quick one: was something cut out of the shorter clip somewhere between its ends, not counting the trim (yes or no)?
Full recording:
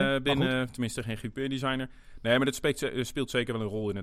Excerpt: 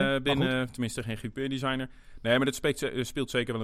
no